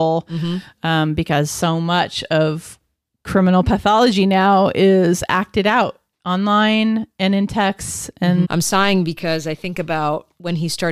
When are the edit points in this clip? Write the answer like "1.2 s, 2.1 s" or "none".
8.4 s